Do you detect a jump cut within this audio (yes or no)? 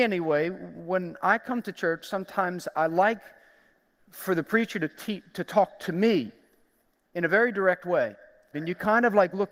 yes